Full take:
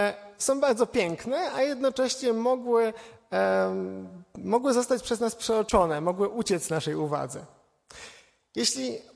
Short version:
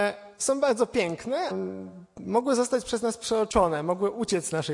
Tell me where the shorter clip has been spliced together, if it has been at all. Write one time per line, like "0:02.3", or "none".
0:01.5